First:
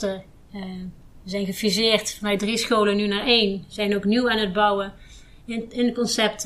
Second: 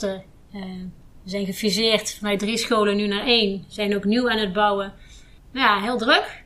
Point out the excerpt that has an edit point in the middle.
second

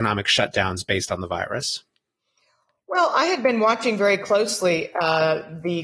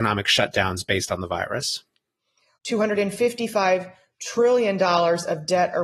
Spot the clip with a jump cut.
second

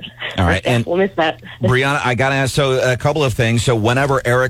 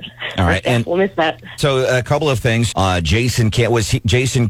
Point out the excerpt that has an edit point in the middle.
second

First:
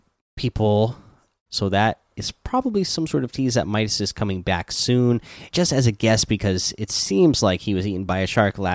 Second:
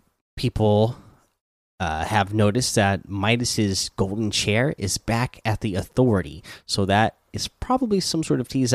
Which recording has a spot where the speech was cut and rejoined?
first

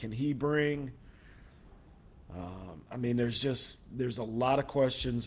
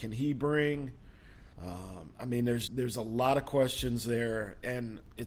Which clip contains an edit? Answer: second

